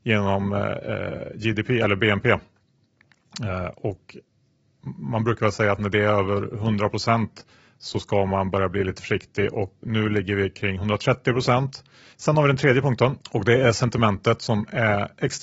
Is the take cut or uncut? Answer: cut